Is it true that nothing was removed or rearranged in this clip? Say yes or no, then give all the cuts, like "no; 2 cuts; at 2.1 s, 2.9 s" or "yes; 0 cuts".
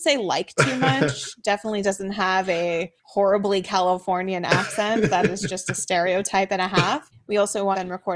yes; 0 cuts